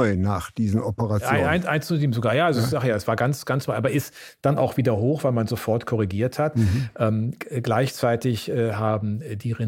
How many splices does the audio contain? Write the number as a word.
zero